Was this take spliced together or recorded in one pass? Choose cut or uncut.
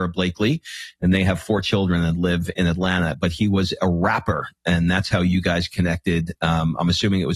uncut